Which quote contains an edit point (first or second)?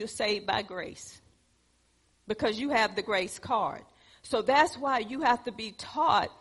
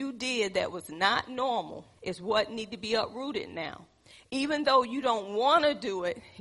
second